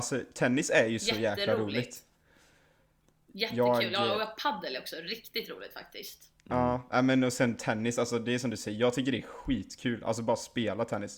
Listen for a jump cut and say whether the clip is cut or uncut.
uncut